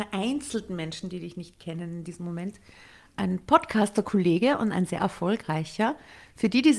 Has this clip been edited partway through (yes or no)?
yes